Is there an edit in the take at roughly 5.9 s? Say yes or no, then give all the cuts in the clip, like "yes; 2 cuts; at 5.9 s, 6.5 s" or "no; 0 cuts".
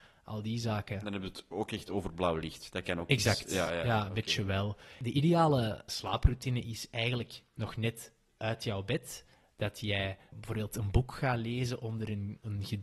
yes; 2 cuts; at 5.9 s, 10.3 s